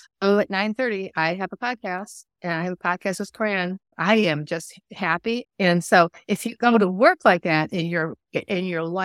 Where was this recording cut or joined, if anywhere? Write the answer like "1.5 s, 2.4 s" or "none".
3.9 s, 5.4 s